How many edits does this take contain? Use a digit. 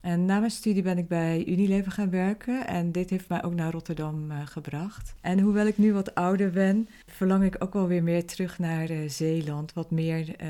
0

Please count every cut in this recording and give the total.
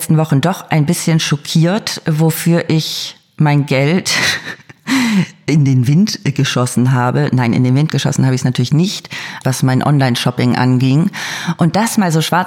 1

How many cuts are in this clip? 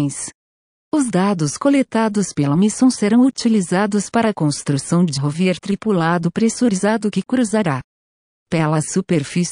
1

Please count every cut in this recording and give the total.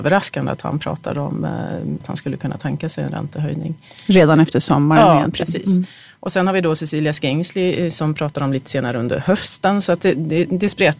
1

